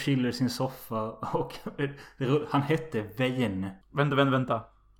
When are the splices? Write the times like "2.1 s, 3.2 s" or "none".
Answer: 3.8 s